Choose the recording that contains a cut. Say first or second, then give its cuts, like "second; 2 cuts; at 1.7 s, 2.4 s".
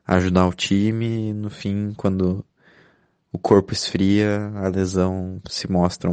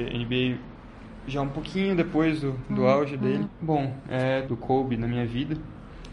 second; 2 cuts; at 3.4 s, 4.5 s